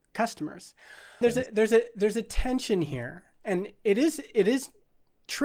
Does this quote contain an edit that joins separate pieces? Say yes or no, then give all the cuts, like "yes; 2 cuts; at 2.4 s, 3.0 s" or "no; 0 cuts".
yes; 1 cut; at 1.2 s